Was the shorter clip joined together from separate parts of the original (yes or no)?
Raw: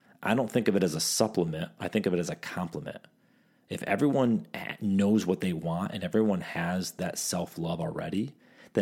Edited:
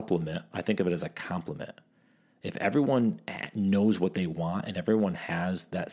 no